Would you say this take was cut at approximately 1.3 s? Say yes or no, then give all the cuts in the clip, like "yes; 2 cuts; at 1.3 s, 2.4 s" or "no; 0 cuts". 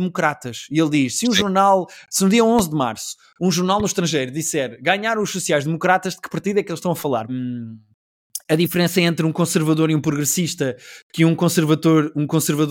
no; 1 cut; at 7.3 s